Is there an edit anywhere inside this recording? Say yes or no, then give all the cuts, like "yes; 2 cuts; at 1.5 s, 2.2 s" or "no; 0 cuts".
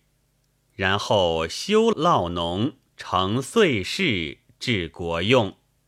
yes; 1 cut; at 1.9 s